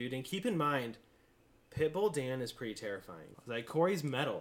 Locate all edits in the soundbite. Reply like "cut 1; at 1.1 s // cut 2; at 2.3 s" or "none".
cut 1; at 3.3 s